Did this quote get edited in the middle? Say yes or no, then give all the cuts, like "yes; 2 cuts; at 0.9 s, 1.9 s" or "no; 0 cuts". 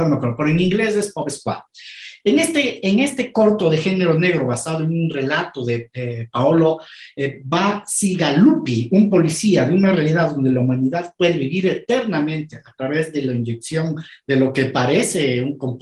no; 0 cuts